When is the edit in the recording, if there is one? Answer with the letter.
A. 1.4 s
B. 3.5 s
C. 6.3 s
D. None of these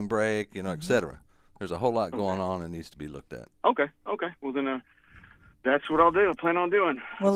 B